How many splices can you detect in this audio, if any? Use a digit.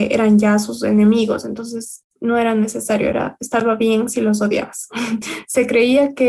0